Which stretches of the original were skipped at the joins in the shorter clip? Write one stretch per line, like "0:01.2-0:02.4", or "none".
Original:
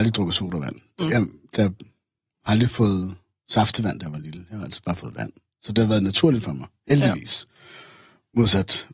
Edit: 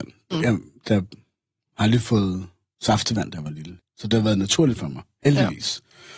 0:04.5-0:05.4